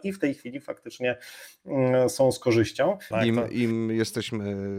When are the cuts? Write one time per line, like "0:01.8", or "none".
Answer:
0:03.1